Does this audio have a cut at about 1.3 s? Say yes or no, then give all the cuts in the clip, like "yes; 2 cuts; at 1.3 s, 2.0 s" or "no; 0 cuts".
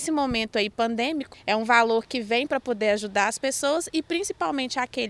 yes; 1 cut; at 1.3 s